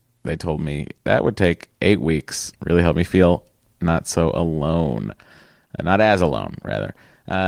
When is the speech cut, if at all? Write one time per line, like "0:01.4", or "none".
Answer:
0:02.6